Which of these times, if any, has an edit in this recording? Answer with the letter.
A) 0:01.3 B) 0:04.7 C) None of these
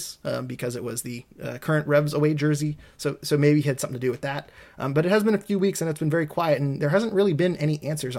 A